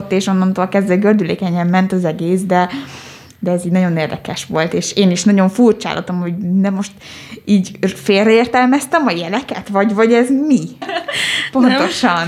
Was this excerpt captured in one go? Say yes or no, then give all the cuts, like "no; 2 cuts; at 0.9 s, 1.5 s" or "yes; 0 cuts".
no; 1 cut; at 10.8 s